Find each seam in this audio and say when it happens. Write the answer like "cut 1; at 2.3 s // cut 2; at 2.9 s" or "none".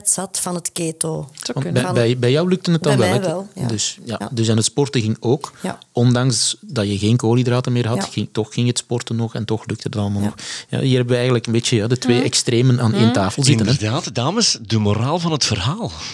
none